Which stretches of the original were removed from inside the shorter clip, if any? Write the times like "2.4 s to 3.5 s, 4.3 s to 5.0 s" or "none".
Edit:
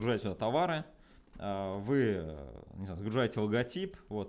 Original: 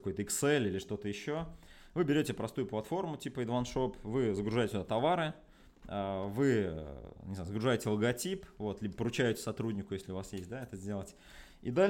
none

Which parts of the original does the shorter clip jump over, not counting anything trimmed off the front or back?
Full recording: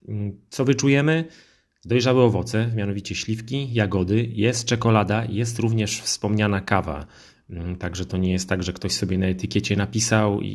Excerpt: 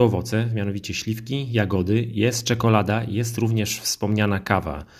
none

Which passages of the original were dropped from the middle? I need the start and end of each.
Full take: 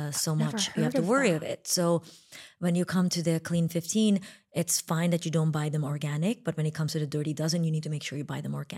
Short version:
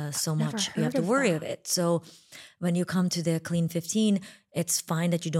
none

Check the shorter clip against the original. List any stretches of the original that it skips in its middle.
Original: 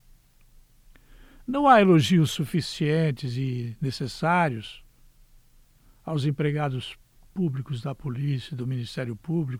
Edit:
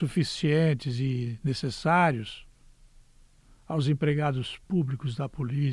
7.0 s to 7.3 s

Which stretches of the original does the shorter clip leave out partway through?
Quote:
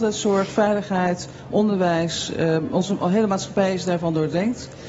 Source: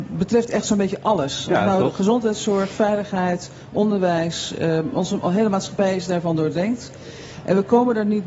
none

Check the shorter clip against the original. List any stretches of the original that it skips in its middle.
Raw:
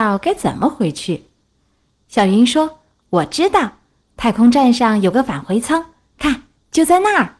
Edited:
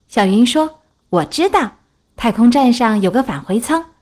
none

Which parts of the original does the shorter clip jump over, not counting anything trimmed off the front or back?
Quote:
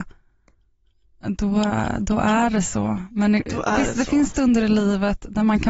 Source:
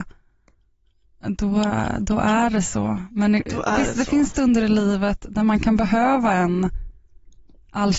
none

